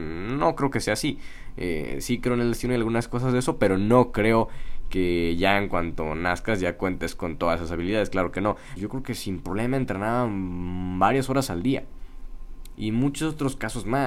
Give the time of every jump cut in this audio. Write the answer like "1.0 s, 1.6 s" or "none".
8.8 s, 12.8 s